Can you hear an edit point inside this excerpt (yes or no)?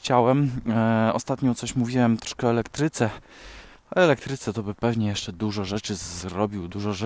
no